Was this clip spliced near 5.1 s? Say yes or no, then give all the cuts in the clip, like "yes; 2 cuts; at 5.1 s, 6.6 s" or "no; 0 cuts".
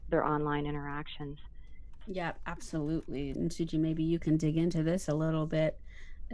no; 2 cuts; at 2.0 s, 3.3 s